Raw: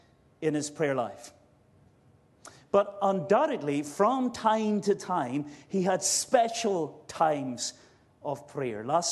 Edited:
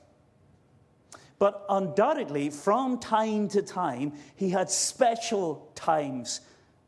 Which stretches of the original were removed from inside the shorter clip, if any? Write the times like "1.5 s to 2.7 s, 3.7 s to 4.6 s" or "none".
none